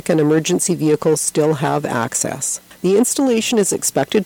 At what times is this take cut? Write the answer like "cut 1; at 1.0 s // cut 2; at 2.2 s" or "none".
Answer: none